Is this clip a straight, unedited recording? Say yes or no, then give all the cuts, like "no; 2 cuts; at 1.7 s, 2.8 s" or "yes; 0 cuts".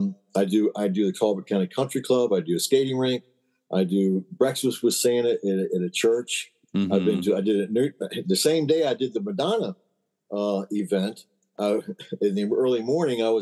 yes; 0 cuts